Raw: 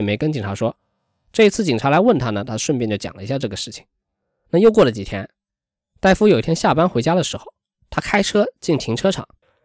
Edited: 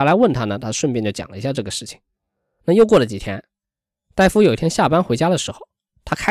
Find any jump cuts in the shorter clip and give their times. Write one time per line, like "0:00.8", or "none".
none

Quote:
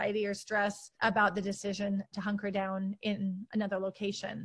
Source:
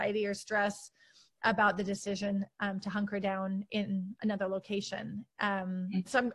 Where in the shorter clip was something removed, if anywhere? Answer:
0:00.9
0:02.1

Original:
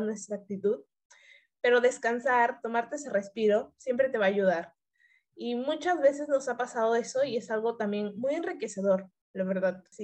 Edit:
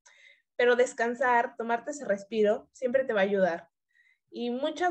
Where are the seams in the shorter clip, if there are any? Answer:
none

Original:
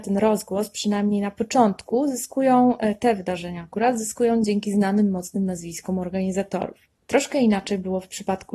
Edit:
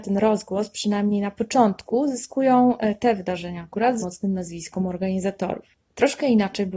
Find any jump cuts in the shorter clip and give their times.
0:04.0

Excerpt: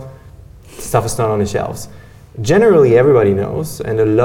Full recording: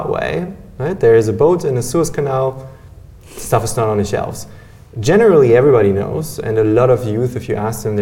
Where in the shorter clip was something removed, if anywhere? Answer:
none

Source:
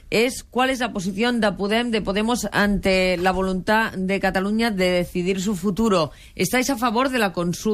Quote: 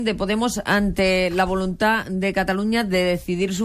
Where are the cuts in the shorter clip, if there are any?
none

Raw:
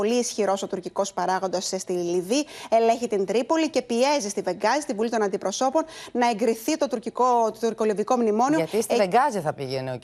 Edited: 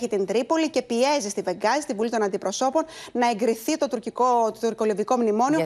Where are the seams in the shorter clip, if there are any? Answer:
none

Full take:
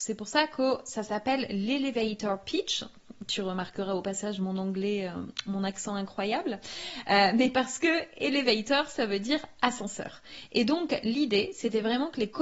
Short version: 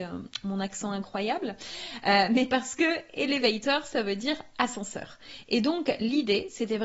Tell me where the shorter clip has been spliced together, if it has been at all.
none

